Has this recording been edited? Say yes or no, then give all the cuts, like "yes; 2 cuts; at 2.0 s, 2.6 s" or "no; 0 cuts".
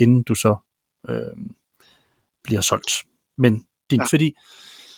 yes; 1 cut; at 4.0 s